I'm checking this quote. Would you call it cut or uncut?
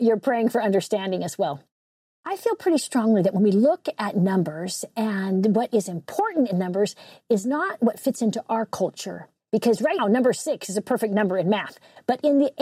cut